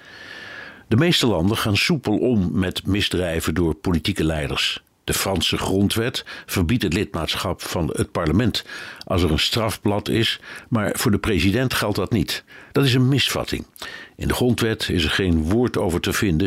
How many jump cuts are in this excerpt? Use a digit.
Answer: 1